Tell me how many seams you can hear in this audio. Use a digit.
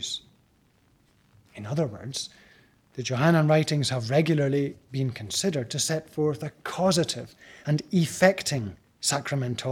0